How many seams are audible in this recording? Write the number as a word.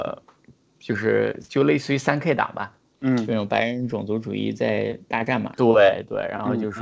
one